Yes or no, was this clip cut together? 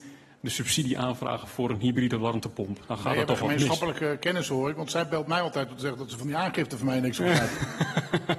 no